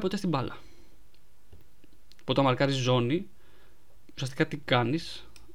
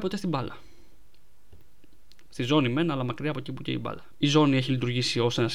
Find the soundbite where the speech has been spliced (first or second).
second